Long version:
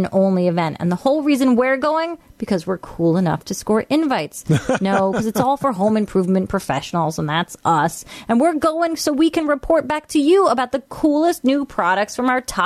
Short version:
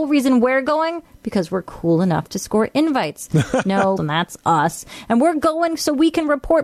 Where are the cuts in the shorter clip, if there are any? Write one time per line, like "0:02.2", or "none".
0:04.0